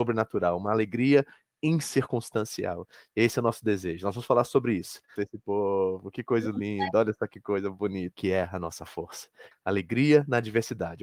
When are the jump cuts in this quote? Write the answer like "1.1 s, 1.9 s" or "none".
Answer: 5.2 s, 8.1 s, 9.5 s